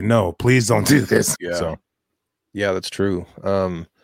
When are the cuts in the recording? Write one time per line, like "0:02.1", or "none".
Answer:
0:01.4